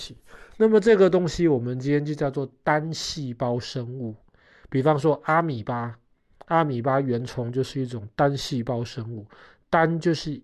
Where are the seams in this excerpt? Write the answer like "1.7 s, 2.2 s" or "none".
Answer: none